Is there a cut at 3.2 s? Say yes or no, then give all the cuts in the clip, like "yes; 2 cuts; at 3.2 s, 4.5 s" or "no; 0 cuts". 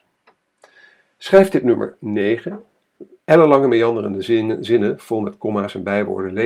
yes; 1 cut; at 3.2 s